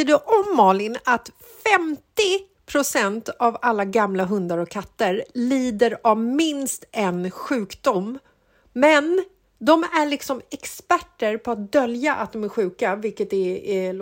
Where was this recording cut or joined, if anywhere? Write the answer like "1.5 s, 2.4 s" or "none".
none